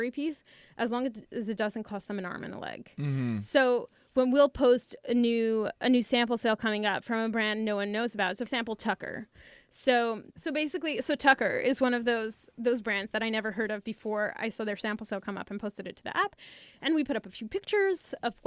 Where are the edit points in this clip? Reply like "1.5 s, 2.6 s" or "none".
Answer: none